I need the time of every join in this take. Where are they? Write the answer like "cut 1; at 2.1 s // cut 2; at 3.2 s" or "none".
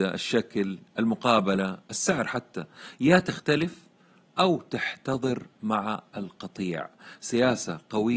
none